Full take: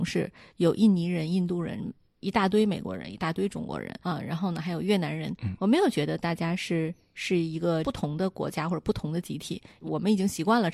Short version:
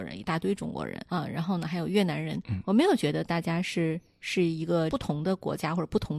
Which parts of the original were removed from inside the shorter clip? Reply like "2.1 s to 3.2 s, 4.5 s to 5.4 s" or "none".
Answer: none